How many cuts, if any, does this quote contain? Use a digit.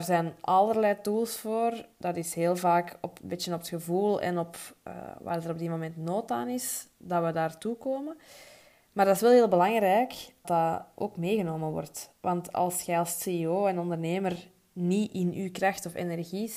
1